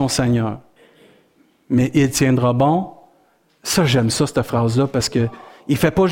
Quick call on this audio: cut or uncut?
uncut